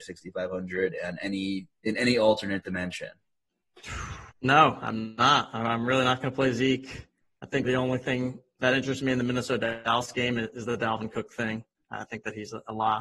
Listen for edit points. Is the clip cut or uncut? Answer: cut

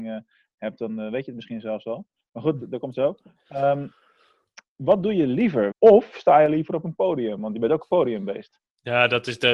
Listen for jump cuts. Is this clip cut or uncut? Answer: cut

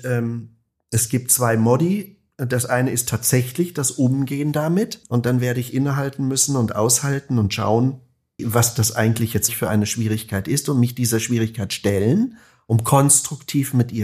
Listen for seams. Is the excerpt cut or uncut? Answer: cut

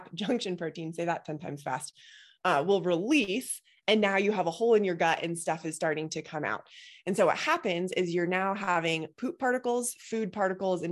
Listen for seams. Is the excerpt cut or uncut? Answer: uncut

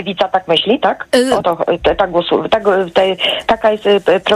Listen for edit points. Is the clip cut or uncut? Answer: uncut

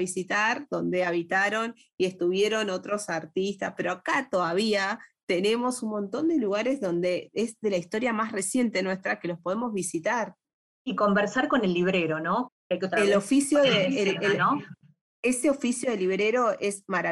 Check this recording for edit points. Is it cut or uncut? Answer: cut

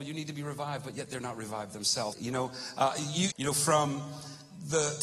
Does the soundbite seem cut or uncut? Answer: cut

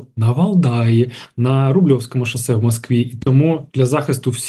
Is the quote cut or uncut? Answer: uncut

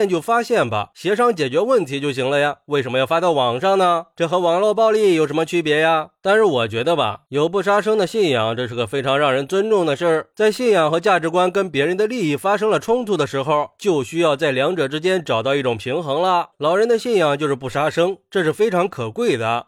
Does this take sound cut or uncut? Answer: cut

